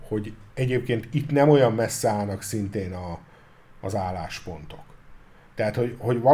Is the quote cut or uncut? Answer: uncut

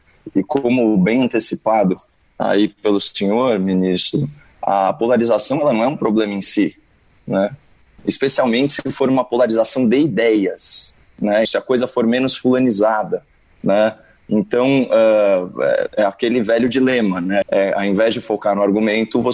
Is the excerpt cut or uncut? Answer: cut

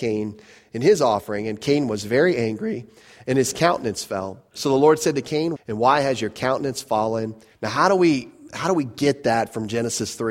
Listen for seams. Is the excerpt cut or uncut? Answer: cut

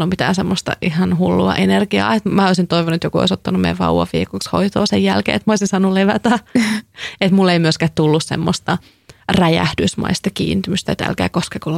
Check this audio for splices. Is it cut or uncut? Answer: cut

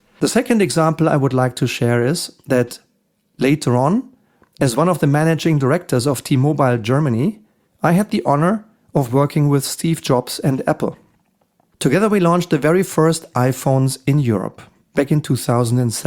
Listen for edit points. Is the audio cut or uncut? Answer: uncut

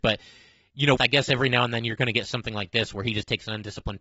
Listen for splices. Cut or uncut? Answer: cut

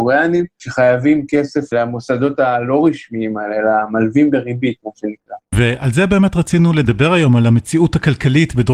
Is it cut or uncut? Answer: uncut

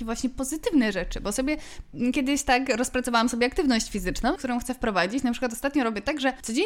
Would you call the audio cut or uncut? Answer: cut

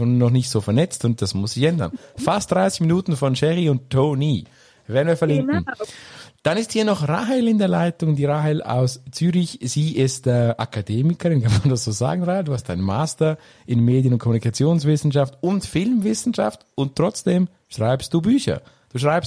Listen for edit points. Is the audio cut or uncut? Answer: uncut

